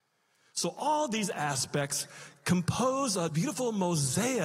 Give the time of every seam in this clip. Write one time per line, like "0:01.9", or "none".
0:03.3